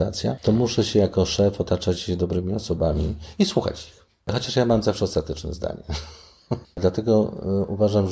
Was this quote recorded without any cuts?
no; 1 cut; at 6.6 s

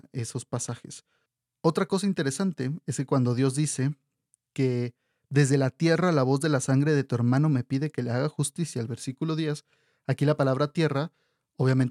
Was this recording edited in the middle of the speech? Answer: no; 0 cuts

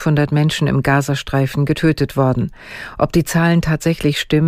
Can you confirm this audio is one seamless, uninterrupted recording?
yes; 0 cuts

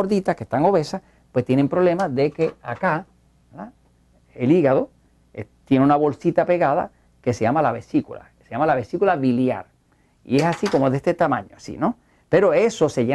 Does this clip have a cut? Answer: no; 0 cuts

